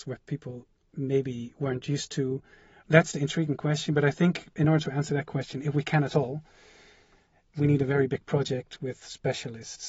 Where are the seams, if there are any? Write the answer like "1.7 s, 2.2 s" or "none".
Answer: 2.8 s